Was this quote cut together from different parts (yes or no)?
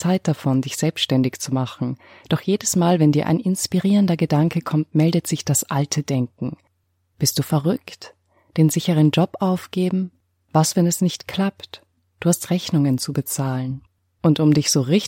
no